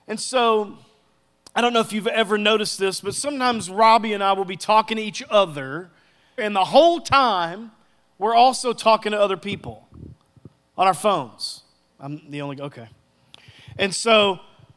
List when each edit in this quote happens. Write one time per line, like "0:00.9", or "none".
0:06.4
0:11.9